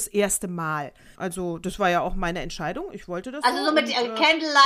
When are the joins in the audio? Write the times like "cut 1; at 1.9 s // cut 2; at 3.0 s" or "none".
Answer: cut 1; at 1.2 s